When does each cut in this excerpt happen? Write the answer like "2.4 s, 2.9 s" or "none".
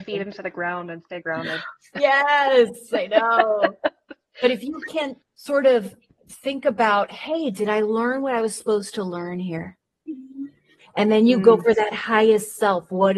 5.2 s